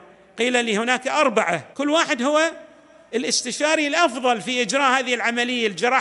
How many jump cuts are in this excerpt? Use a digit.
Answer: 1